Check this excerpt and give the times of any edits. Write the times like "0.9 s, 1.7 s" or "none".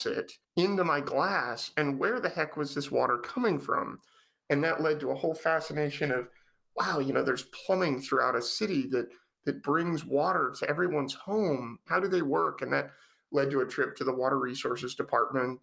11.9 s